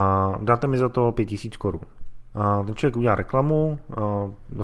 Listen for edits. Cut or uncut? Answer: cut